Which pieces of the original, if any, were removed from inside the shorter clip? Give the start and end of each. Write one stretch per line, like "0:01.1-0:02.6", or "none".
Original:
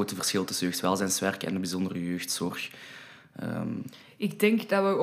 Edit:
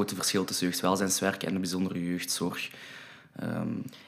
none